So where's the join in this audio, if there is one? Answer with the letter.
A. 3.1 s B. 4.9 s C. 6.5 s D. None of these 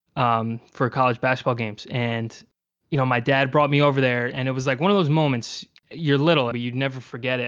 C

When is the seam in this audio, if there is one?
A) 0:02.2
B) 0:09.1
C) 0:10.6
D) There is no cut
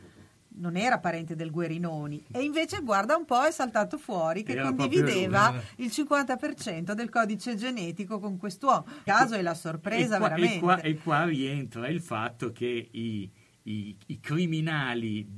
B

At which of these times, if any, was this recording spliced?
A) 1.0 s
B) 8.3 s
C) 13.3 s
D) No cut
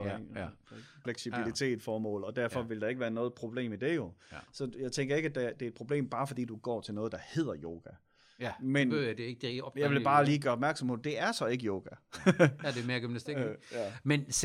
A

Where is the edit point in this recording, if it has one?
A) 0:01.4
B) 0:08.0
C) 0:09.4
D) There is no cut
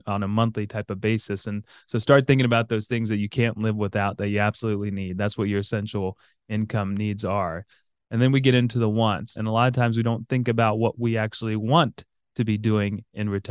C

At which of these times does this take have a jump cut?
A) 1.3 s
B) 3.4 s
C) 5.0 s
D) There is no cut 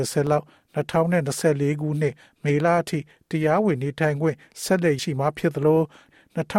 C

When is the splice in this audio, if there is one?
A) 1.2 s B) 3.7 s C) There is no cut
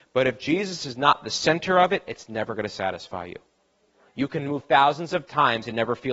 C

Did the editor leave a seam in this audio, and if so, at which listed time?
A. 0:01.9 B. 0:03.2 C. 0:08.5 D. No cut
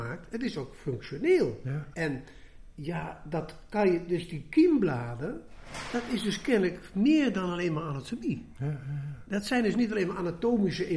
A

